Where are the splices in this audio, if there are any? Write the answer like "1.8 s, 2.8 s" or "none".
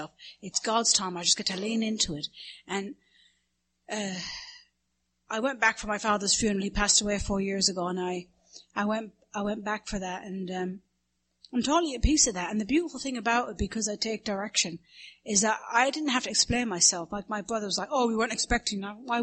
none